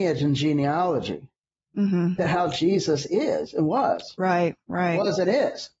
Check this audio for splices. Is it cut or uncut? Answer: cut